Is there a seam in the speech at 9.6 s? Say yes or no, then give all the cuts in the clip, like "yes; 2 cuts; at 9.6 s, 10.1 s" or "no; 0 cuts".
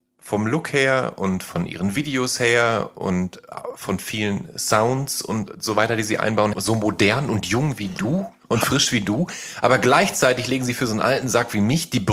no; 1 cut; at 6.5 s